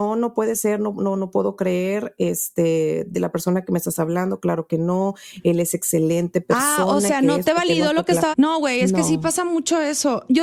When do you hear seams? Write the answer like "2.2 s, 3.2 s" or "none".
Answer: 8.3 s